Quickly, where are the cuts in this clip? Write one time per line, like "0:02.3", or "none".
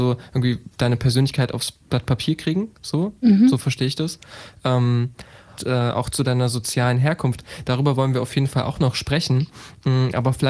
0:05.6